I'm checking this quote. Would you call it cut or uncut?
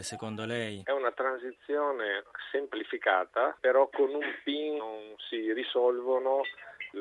cut